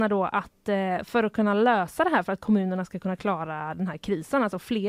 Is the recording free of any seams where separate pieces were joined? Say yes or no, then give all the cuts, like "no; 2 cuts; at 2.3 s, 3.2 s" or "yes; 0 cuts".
yes; 0 cuts